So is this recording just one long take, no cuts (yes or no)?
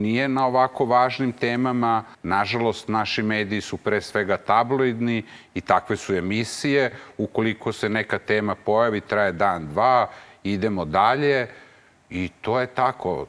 no